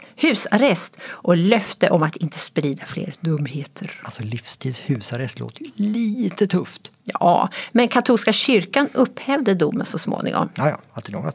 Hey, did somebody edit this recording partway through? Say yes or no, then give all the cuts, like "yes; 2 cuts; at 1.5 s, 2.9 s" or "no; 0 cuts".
no; 0 cuts